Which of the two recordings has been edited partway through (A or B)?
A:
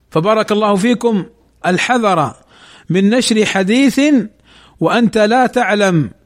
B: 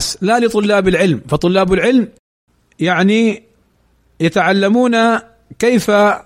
A